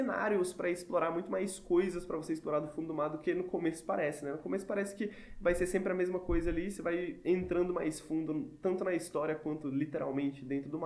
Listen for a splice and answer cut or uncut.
uncut